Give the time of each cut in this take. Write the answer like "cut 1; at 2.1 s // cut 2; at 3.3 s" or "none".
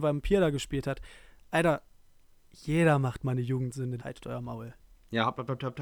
cut 1; at 4.0 s